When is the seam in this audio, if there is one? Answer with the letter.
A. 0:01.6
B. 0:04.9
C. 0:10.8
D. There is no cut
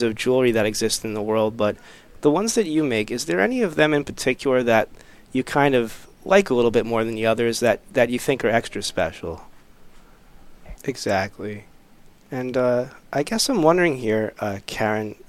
C